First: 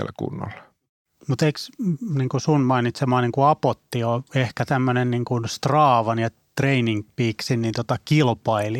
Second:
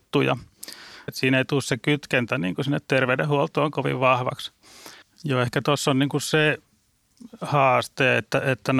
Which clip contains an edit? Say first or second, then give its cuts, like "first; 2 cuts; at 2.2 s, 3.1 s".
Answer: second; 2 cuts; at 1.1 s, 5.0 s